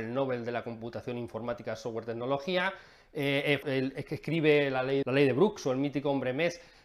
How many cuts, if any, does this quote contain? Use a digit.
2